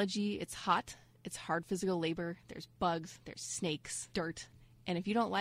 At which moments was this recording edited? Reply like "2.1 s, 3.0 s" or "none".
4.1 s